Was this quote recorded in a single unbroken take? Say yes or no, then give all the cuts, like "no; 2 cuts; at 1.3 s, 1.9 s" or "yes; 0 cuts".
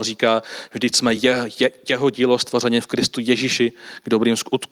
yes; 0 cuts